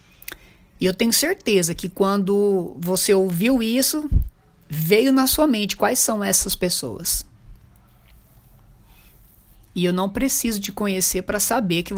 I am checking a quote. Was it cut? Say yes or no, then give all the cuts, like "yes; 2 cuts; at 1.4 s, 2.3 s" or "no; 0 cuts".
no; 0 cuts